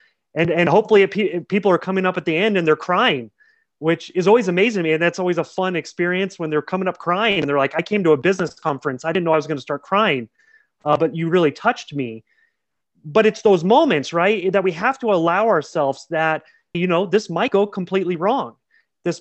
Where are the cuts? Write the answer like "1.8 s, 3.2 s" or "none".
16.7 s